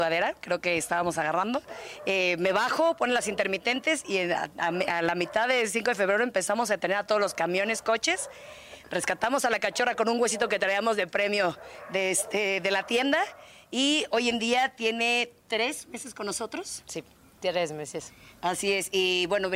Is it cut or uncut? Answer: uncut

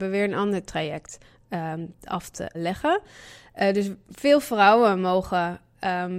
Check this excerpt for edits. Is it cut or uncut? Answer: cut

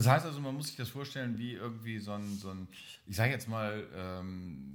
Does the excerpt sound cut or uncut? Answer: uncut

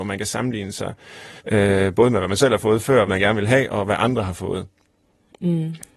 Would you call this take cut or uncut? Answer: cut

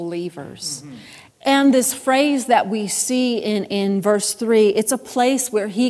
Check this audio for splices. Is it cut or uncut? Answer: cut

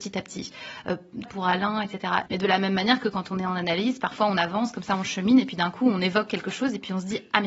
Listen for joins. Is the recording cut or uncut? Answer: cut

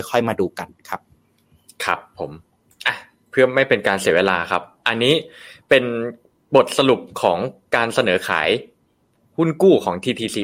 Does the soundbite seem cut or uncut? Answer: uncut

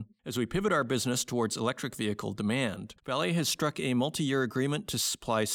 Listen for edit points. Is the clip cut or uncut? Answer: cut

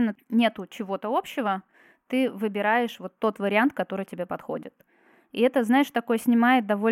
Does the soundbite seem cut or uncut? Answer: uncut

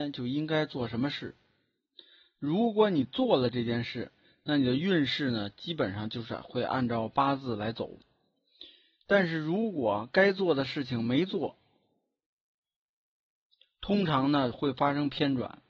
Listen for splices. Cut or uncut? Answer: uncut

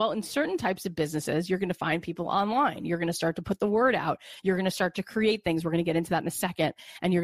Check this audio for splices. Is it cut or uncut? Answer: uncut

